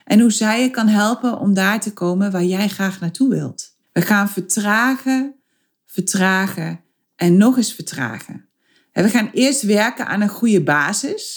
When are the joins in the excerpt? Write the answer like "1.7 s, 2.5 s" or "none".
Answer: 3.8 s